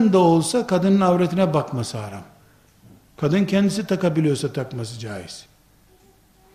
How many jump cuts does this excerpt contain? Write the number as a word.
zero